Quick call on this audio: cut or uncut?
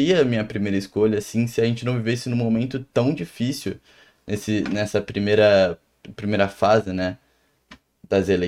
uncut